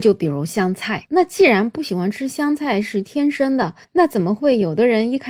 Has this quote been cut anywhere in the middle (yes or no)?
yes